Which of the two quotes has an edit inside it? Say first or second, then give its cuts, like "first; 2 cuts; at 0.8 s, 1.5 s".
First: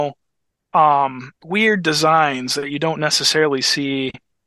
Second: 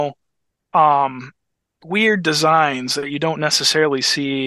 first; 1 cut; at 1.4 s